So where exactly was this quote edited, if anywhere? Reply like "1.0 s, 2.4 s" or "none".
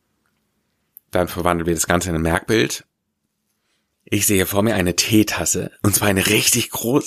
none